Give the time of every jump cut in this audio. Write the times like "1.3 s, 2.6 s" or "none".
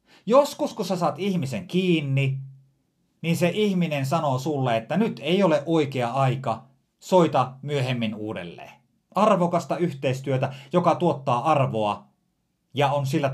9.0 s